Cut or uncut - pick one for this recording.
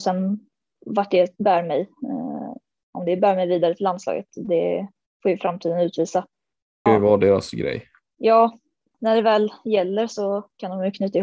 cut